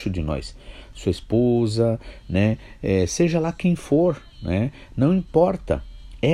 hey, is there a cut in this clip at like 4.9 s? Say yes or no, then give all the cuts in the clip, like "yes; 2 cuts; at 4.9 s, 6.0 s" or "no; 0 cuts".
no; 1 cut; at 0.9 s